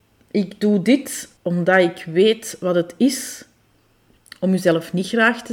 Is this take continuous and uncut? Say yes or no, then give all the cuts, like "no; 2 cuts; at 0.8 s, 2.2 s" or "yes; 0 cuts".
no; 1 cut; at 1.4 s